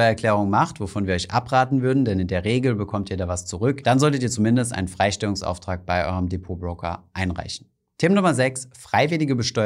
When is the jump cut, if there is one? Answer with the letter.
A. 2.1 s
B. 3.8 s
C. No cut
B